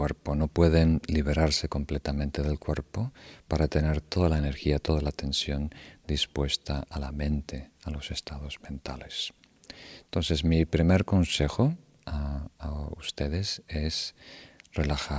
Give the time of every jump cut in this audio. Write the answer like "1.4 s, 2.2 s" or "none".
none